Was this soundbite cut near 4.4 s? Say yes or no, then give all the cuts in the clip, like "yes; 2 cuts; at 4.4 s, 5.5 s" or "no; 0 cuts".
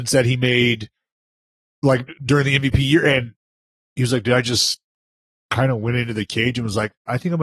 no; 0 cuts